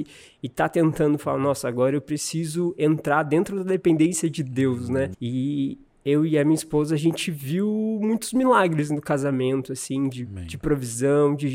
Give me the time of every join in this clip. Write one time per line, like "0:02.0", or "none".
0:05.1